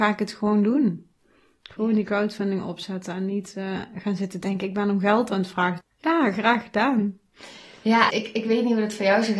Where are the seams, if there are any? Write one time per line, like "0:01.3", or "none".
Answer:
0:05.8
0:08.1